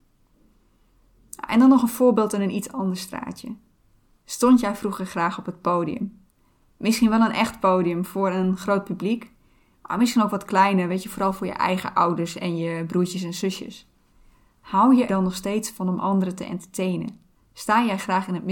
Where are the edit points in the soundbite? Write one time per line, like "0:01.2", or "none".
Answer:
0:15.1

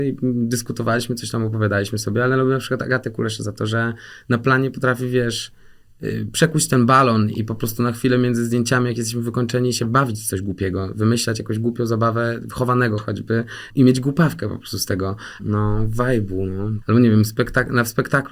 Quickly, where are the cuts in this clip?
0:13.7
0:15.4
0:16.8

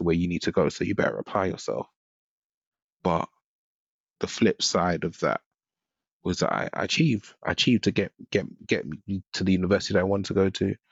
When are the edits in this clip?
0:02.8

